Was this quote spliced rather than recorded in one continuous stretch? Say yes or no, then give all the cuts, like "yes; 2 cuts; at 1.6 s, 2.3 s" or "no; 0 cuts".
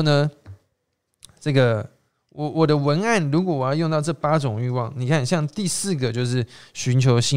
no; 0 cuts